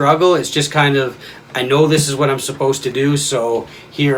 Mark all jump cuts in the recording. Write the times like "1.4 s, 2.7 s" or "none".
none